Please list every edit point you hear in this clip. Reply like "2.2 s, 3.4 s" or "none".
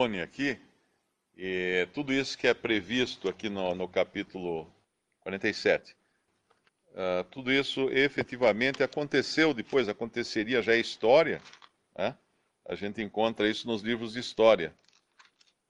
none